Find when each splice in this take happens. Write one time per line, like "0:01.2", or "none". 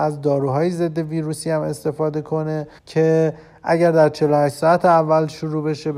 0:02.8